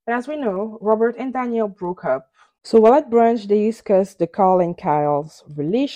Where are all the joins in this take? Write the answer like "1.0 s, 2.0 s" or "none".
2.6 s